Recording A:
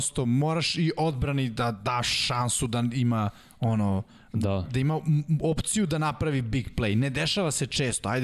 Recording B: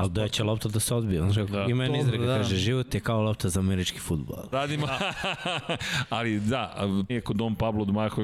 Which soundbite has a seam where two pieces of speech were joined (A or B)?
B